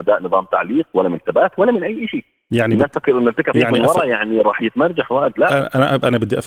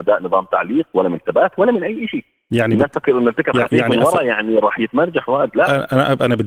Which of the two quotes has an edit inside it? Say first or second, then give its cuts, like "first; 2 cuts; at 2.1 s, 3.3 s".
first; 1 cut; at 3.5 s